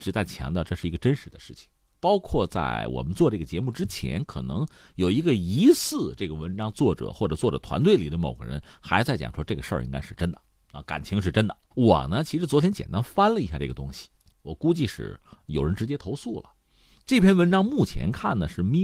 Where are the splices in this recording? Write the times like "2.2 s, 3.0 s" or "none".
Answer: 11.7 s, 14.3 s